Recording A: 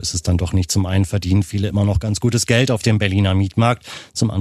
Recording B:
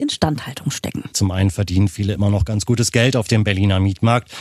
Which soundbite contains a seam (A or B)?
B